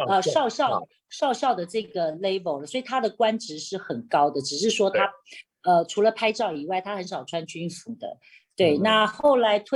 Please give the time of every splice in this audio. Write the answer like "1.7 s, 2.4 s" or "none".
none